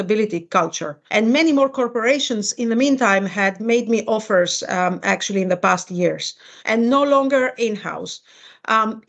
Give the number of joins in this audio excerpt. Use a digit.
2